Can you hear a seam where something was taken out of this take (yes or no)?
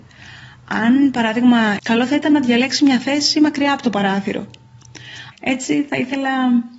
yes